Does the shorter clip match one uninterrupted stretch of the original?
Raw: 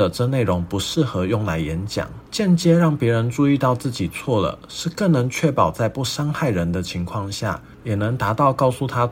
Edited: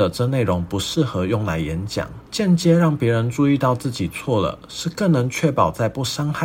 yes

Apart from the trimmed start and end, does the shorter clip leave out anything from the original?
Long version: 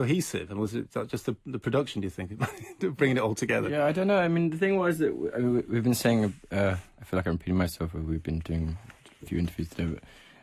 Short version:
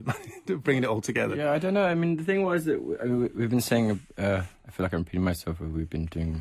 no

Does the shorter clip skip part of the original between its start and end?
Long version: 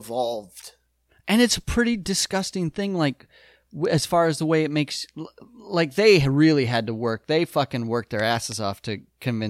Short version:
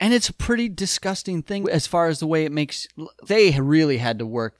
yes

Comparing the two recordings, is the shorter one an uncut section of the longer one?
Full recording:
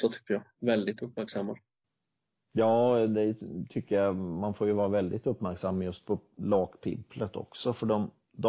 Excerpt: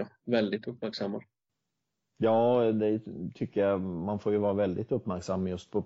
yes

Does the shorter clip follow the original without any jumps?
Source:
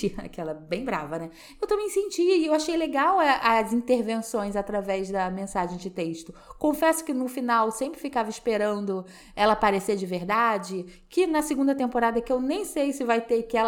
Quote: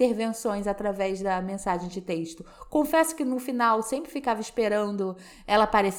yes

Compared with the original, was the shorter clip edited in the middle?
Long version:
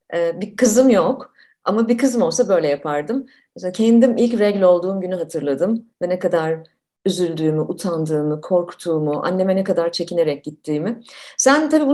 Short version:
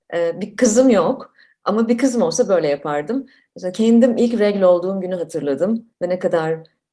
no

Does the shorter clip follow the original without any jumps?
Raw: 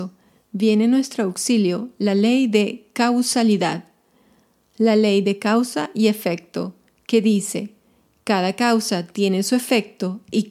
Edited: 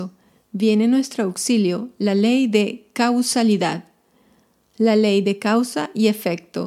yes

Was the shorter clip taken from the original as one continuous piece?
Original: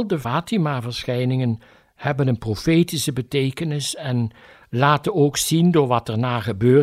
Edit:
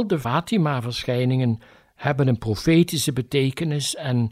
yes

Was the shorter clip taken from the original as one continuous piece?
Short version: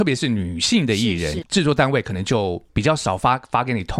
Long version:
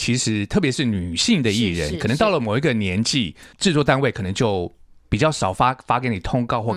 no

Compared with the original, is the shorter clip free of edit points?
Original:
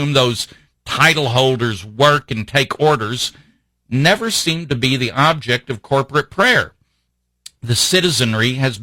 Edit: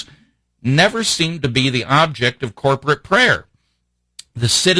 yes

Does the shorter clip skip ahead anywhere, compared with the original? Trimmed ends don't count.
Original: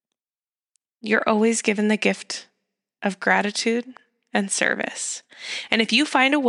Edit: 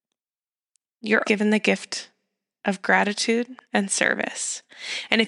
yes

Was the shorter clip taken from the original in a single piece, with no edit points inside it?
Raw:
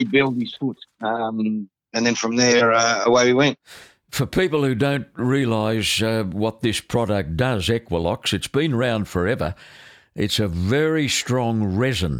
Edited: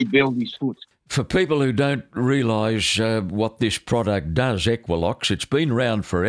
no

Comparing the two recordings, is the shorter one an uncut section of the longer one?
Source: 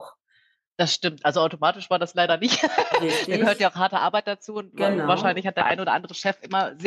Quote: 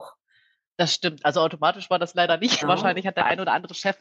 no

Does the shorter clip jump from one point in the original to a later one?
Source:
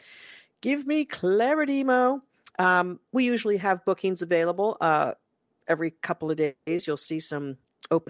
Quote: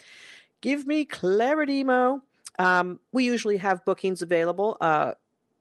no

